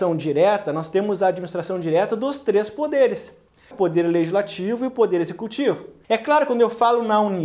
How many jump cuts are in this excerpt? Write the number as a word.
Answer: two